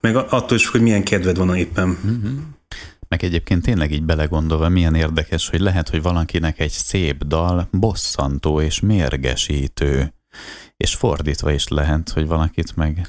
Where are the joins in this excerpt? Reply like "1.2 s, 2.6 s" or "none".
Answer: none